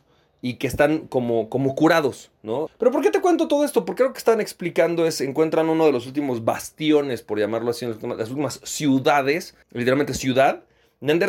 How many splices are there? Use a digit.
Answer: 2